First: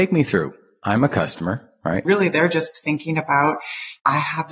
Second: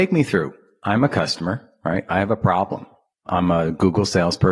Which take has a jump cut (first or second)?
first